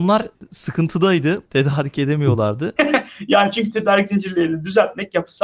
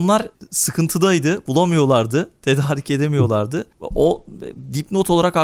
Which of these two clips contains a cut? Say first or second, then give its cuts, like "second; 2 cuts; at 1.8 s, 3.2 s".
first; 2 cuts; at 1.4 s, 2.8 s